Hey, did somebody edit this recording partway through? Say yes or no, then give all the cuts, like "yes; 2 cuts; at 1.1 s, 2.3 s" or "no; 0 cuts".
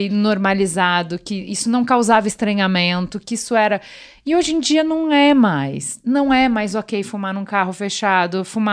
no; 0 cuts